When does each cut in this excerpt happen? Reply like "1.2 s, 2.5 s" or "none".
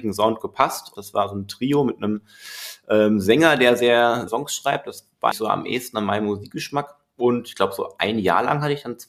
1.0 s, 4.3 s, 5.3 s